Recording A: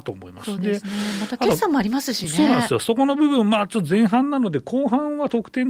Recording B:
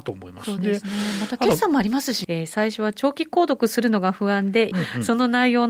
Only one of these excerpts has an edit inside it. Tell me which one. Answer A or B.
B